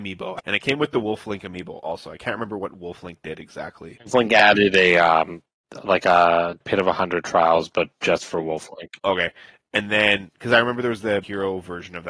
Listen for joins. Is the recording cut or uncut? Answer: uncut